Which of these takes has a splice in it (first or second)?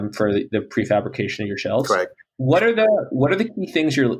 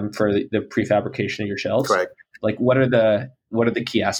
second